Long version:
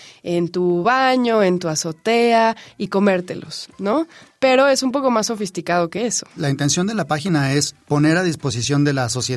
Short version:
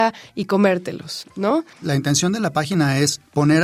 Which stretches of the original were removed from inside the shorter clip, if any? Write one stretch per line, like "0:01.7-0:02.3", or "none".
0:04.2-0:06.3